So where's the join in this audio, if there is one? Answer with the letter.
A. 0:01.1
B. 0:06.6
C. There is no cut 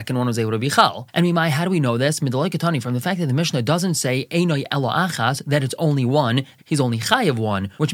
B